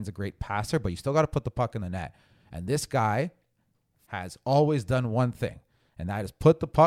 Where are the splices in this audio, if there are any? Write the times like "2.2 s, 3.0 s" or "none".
4.0 s